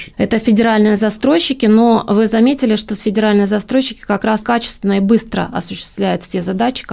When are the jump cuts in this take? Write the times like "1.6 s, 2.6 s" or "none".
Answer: 4.4 s